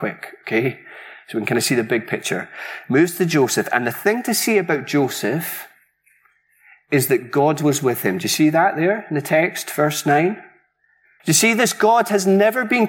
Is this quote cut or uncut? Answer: cut